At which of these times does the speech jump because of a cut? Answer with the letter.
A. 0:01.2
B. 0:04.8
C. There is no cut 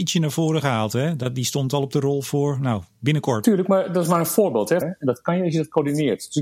B